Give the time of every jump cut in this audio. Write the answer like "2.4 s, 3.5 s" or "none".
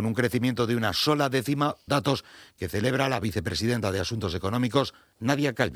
1.9 s